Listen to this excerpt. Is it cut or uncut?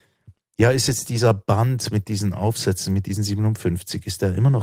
uncut